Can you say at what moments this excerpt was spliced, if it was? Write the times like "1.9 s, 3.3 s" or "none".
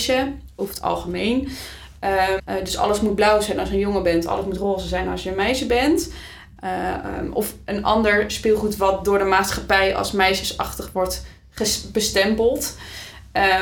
2.4 s, 6.6 s